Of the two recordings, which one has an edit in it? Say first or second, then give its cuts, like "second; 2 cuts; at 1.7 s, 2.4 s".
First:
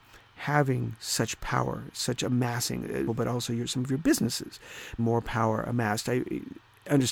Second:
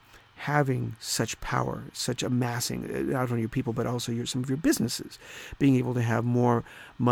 first; 2 cuts; at 3.1 s, 5.0 s